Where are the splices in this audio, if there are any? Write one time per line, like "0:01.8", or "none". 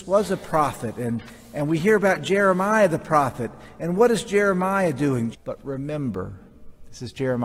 0:05.3